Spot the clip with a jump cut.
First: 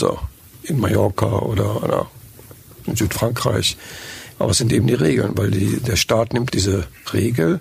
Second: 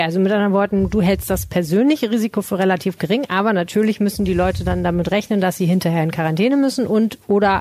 first; 2 cuts; at 4.3 s, 6.5 s

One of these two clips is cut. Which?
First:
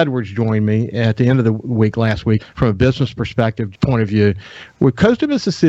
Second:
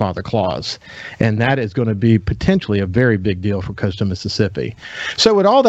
first; 2 cuts; at 2.4 s, 3.7 s

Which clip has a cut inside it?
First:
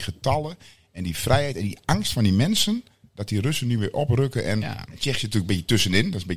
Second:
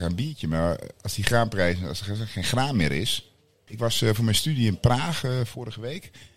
second; 1 cut; at 3.7 s

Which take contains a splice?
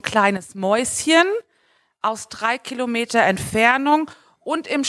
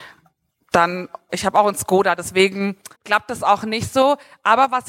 second; 2 cuts; at 1.3 s, 2.9 s

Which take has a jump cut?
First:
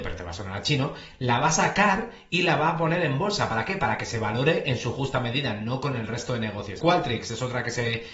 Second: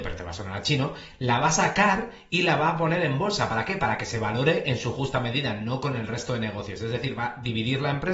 first; 1 cut; at 6.8 s

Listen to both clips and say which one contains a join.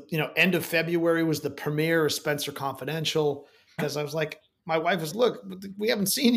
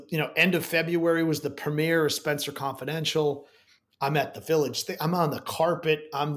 first; 2 cuts; at 3.8 s, 5.1 s

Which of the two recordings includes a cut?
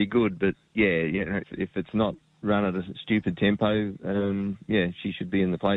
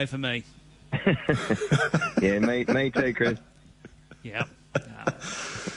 first; 1 cut; at 1.4 s

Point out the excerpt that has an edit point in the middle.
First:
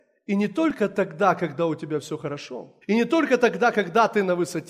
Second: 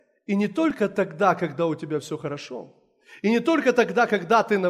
first; 1 cut; at 2.8 s

